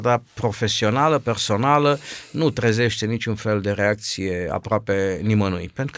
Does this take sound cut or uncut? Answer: uncut